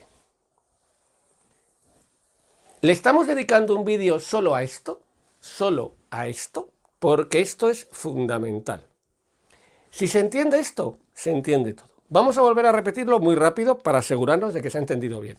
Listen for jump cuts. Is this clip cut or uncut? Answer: uncut